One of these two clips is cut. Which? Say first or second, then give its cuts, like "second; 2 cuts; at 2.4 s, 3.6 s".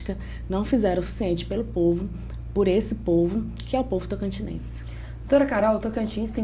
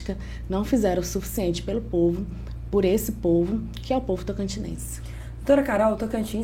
first; 1 cut; at 1.0 s